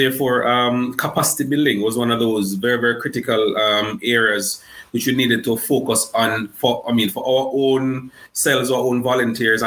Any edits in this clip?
no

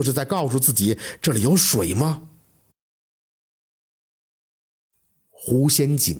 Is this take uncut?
yes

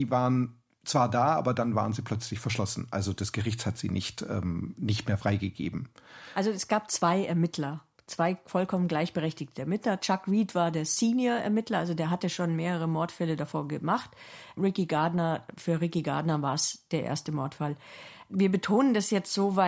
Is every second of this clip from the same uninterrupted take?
yes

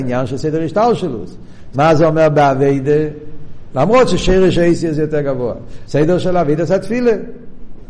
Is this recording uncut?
no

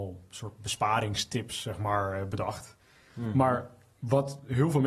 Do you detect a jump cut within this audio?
no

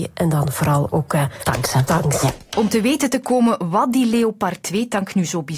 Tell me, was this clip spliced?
no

